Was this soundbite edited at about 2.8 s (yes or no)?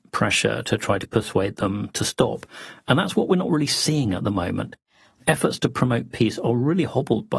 no